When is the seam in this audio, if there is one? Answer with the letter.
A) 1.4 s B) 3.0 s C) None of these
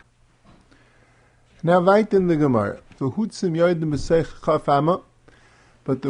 B